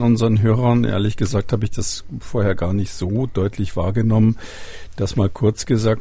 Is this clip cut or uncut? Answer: uncut